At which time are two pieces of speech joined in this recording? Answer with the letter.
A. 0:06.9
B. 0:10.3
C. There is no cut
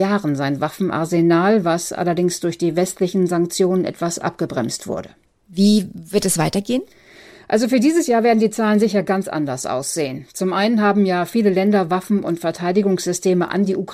C